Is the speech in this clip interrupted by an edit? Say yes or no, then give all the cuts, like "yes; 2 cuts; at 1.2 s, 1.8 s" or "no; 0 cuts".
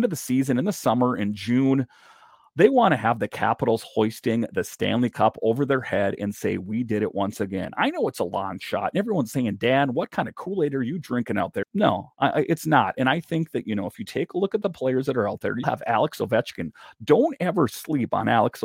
yes; 2 cuts; at 11.6 s, 15.6 s